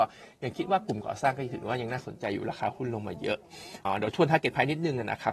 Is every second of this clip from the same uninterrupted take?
no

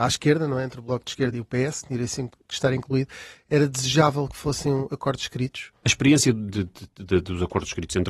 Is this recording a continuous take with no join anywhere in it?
no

